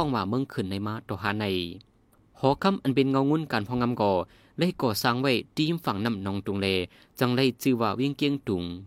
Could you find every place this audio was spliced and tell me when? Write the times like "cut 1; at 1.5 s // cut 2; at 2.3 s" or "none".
none